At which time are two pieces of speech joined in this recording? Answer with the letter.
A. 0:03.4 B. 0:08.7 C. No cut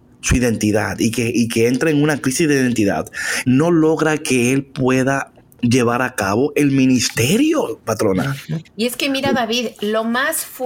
A